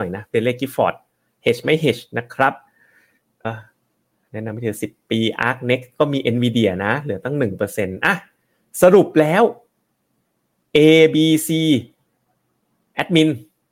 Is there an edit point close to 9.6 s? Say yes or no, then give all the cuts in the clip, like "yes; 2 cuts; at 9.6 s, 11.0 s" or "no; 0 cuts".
no; 1 cut; at 3.4 s